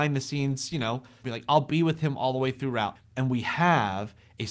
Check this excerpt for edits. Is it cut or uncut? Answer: cut